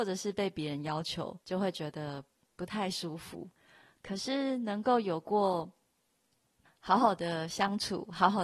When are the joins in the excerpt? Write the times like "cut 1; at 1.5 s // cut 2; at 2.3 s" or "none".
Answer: cut 1; at 1.4 s // cut 2; at 6.7 s